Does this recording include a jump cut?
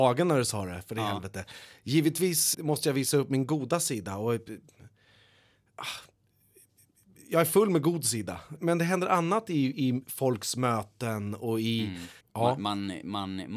yes; 2 cuts; at 2.5 s, 12.2 s

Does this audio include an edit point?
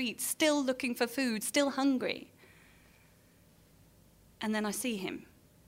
no; 0 cuts

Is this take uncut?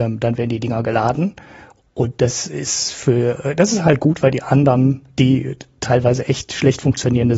yes; 0 cuts

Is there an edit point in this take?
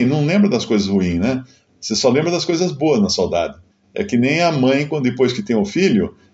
no; 0 cuts

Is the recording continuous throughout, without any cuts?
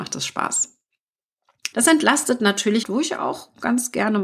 no; 2 cuts; at 1.7 s, 2.8 s

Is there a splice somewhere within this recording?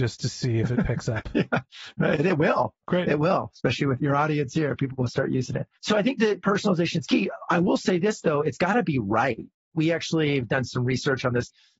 yes; 1 cut; at 5.8 s

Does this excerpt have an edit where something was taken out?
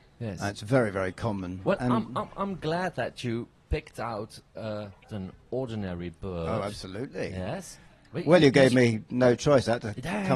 yes; 1 cut; at 5.1 s

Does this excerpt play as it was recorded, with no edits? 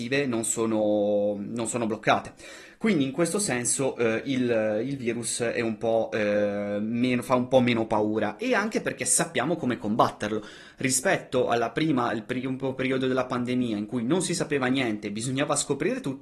yes; 0 cuts

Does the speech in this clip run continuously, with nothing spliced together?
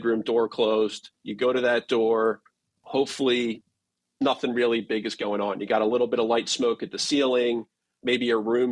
no; 1 cut; at 2.7 s

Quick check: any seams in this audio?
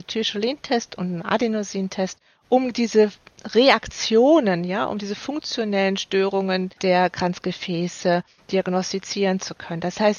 no; 0 cuts

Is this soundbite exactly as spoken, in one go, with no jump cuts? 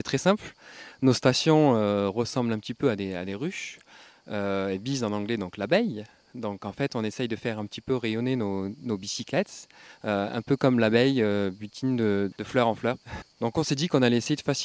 no; 1 cut; at 13.2 s

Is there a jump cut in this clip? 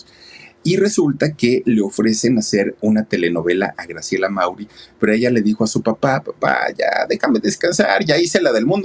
no; 0 cuts

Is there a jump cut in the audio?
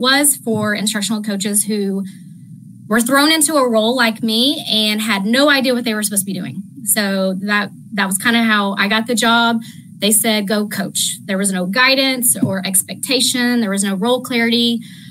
no; 0 cuts

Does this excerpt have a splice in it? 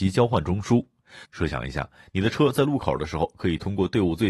yes; 1 cut; at 1.3 s

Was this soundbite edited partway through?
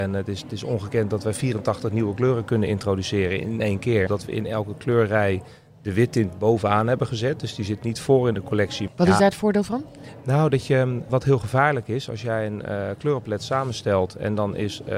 yes; 3 cuts; at 4.1 s, 8.9 s, 11.1 s

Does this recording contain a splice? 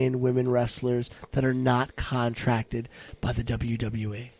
no; 0 cuts

